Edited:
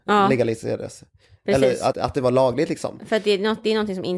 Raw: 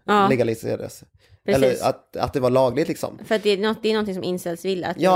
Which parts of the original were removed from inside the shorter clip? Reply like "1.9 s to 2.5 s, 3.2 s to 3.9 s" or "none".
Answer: 1.9 s to 2.1 s